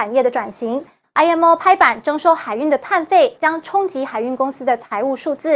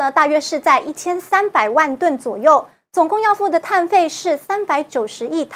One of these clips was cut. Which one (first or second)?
first